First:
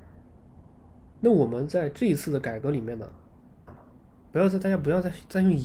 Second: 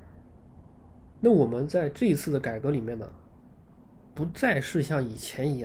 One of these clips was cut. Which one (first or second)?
first